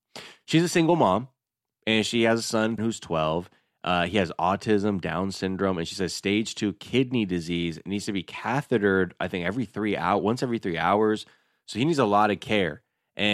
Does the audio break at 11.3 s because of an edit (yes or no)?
no